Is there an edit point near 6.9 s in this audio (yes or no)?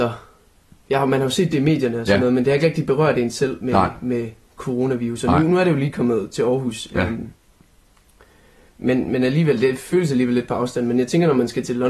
no